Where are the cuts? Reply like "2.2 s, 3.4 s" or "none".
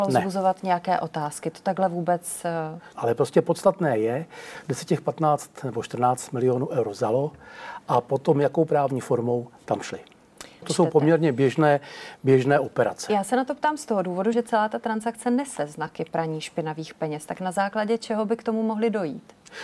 3.0 s, 10.6 s, 14.3 s